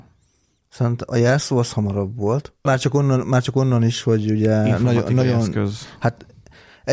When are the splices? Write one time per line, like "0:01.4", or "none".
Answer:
0:02.7